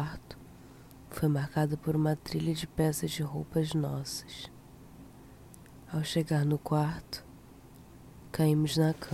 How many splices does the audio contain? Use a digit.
1